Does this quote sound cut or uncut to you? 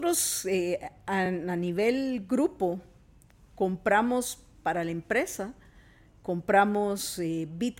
uncut